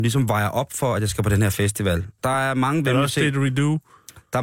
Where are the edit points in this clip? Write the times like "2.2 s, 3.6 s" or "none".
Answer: 2.2 s